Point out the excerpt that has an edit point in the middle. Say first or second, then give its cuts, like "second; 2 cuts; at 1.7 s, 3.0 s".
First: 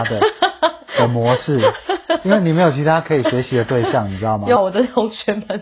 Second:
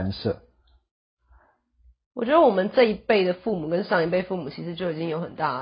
first; 1 cut; at 4.6 s